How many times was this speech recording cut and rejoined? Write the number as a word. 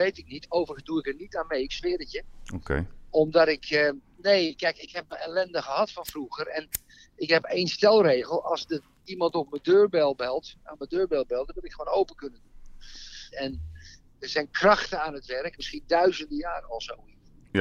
two